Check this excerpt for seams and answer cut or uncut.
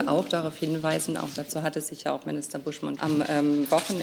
cut